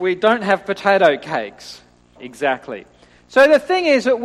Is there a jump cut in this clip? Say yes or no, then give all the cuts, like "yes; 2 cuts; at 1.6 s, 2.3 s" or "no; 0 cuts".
yes; 1 cut; at 2.2 s